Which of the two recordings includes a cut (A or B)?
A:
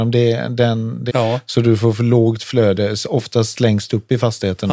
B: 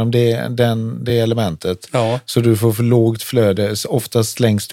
A